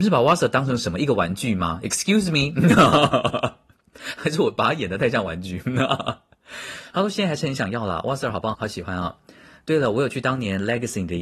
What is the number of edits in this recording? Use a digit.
1